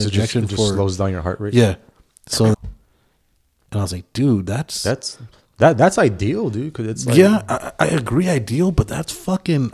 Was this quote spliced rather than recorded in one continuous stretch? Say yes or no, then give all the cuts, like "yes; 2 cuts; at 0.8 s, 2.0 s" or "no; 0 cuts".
yes; 1 cut; at 2.5 s